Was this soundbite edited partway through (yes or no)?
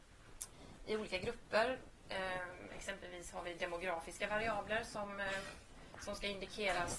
no